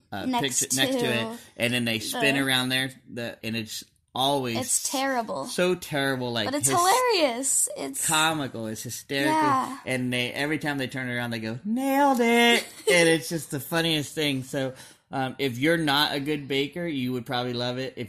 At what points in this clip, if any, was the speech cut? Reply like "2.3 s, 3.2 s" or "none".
3.4 s